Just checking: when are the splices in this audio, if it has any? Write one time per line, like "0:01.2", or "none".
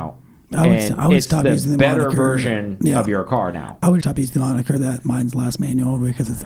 0:04.0